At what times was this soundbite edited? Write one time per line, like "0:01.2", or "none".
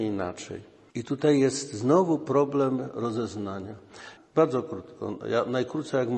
0:04.2